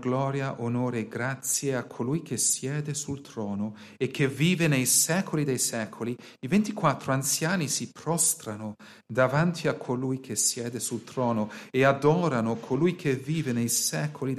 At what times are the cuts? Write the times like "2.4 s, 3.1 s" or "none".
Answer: none